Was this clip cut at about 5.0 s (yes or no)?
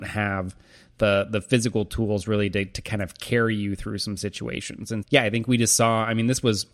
yes